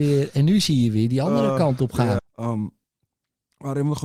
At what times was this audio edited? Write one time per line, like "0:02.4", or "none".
0:02.2

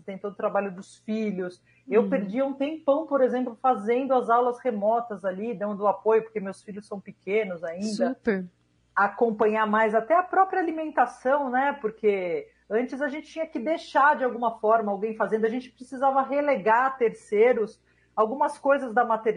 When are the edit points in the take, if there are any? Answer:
0:08.8

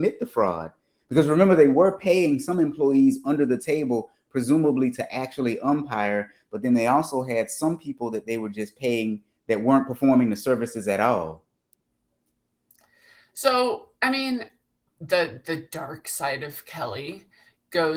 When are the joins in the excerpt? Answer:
0:14.9

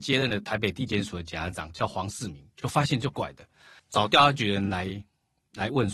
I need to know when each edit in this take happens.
0:03.1

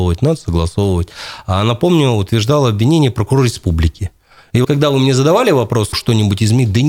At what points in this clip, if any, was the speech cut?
0:04.6
0:05.9

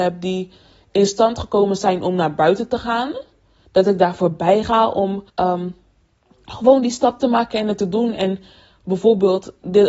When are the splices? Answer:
0:05.3

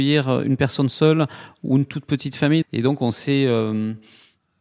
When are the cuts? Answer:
0:02.6

